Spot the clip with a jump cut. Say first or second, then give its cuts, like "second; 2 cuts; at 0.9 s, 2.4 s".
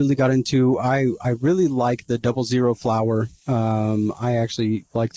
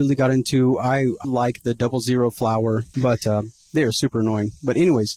second; 2 cuts; at 1.2 s, 2.9 s